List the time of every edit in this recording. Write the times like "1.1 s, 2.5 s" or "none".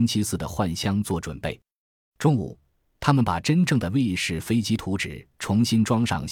none